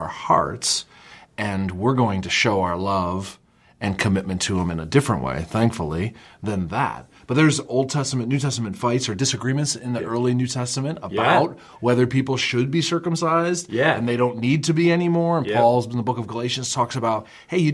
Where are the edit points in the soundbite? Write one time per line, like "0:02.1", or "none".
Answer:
none